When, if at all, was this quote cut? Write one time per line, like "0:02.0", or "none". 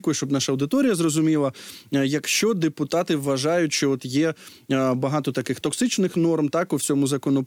0:05.6